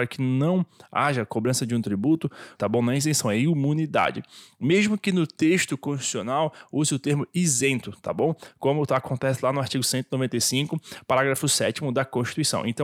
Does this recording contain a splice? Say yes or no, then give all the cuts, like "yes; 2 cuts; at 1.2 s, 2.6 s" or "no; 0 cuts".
yes; 1 cut; at 2.5 s